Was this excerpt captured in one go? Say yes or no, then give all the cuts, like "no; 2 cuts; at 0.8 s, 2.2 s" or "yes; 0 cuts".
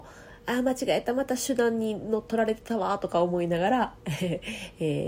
yes; 0 cuts